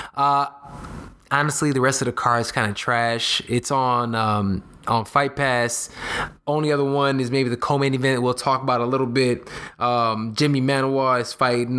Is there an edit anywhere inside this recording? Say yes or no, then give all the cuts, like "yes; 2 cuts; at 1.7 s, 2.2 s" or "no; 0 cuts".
no; 0 cuts